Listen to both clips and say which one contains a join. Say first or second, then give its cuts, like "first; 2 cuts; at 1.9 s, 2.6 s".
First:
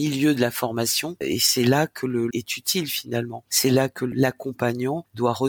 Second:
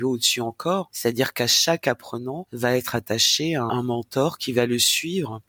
first; 2 cuts; at 1.2 s, 2.3 s